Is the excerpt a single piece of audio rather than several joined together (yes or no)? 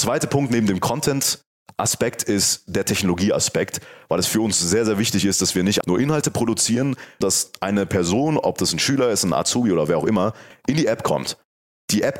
no